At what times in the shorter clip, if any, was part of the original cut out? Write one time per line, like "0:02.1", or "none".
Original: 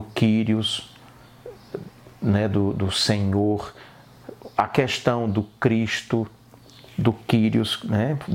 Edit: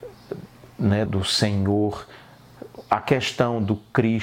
0:01.1